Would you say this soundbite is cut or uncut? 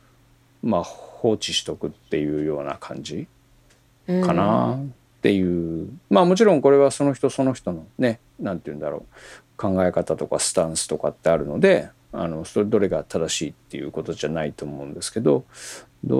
uncut